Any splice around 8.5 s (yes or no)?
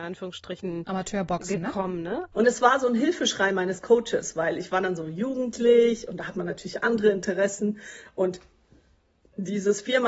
no